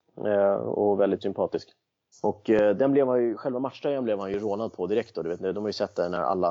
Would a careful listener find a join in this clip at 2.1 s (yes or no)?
yes